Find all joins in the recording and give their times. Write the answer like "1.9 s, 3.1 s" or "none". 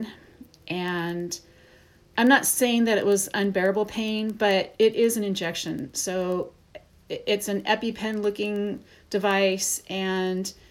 none